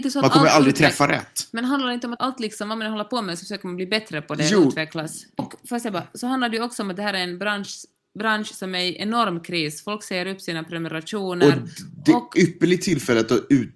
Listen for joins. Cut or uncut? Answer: cut